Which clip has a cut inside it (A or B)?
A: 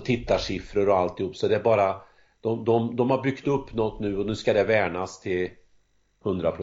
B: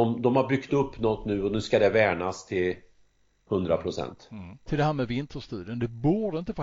B